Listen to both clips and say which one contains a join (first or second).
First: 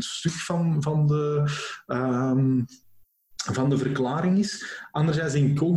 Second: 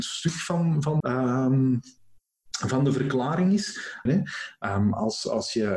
second